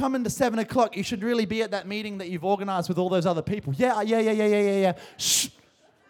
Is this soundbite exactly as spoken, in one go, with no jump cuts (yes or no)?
yes